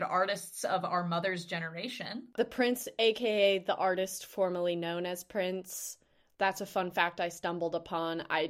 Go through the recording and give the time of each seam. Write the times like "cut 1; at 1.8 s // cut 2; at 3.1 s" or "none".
none